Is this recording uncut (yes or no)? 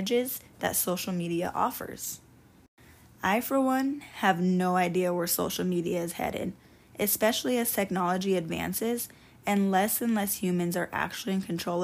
yes